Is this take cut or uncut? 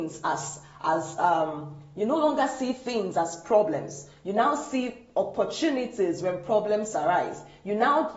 uncut